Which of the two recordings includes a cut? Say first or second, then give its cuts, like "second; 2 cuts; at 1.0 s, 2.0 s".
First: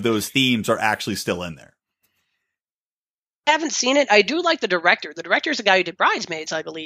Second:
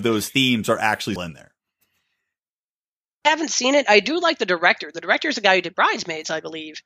second; 1 cut; at 1.2 s